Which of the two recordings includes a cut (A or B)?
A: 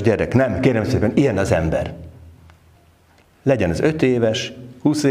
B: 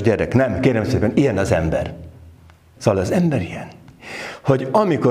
B